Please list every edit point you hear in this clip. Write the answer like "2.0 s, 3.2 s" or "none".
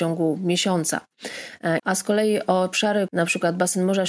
1.8 s, 3.1 s

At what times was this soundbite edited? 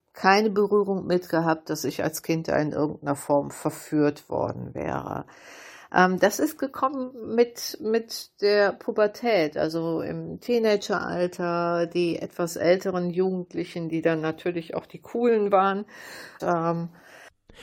16.4 s

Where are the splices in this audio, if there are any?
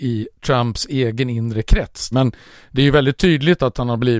2.1 s

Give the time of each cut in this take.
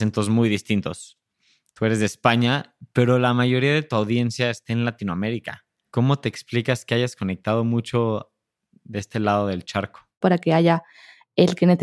10.2 s

